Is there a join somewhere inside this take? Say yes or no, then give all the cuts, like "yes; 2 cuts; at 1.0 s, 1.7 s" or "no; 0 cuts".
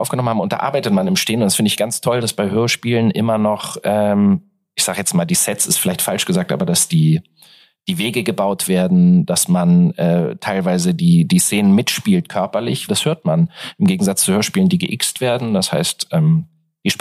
yes; 1 cut; at 12.9 s